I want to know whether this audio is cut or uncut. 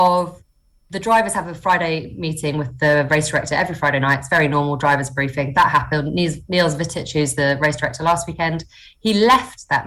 uncut